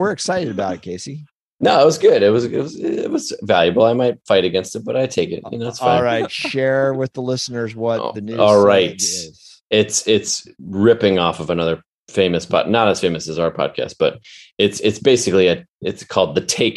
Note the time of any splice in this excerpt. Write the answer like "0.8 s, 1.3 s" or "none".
none